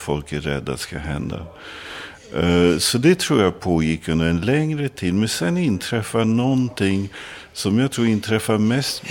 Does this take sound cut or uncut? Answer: uncut